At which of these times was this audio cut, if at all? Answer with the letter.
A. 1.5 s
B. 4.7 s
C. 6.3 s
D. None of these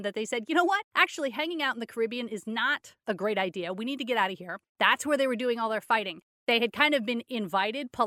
B